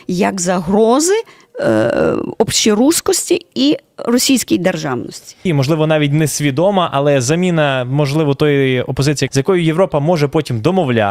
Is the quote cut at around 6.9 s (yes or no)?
no